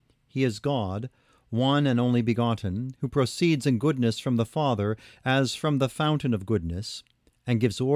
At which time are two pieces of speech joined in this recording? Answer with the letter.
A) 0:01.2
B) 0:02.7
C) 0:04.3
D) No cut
D